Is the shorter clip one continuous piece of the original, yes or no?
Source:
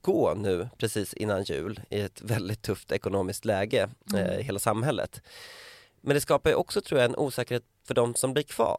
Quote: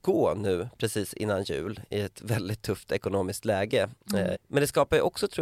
no